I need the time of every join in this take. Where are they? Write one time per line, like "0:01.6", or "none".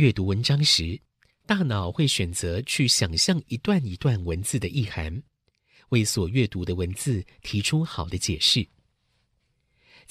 none